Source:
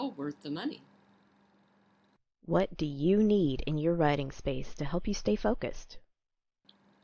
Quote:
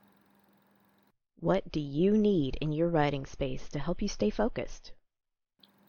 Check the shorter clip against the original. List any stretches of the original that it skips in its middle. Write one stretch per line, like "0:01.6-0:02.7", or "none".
none